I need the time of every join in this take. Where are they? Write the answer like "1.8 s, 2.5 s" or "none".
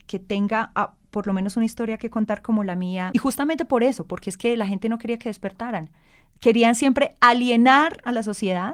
3.1 s

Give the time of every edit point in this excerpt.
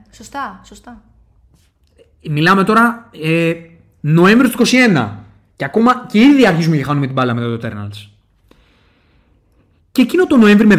none

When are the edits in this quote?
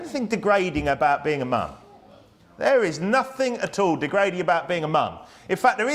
none

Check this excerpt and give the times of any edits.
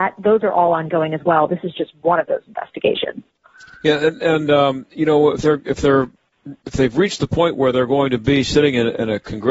none

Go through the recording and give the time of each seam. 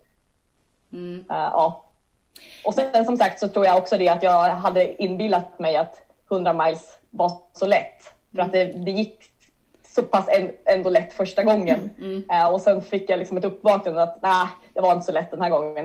none

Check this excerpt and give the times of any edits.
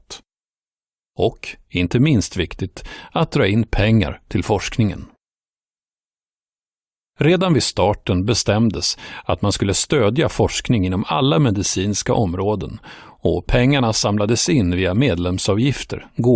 1.0 s

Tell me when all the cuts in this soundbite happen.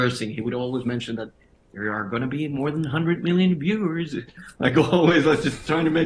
none

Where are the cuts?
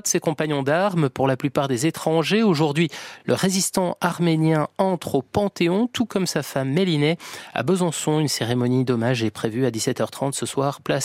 none

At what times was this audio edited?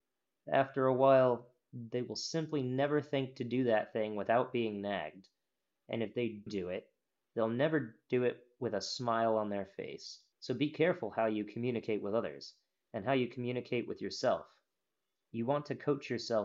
6.5 s, 10.3 s

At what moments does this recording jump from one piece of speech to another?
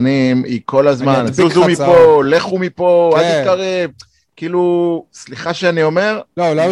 none

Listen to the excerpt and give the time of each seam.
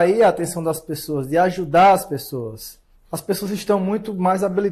2.9 s

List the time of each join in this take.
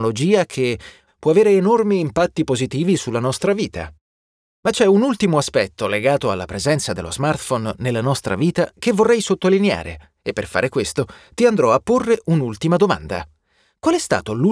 1.1 s

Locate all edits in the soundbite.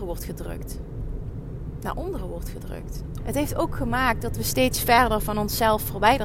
3.2 s

